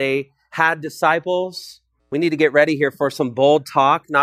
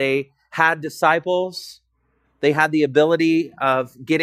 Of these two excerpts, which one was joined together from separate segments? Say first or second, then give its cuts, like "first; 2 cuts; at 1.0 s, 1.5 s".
first; 1 cut; at 2.0 s